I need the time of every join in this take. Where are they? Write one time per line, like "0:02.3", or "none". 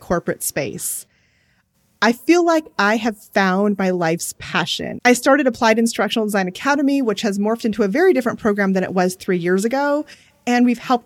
0:05.0